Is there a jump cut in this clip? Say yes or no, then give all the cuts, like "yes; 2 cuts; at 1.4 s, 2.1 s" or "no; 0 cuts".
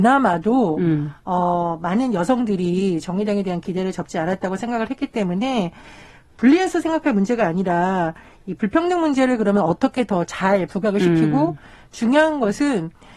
no; 0 cuts